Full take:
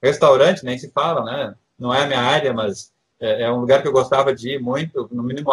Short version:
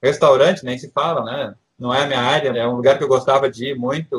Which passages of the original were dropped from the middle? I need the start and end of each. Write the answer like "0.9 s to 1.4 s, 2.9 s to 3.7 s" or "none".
2.5 s to 3.4 s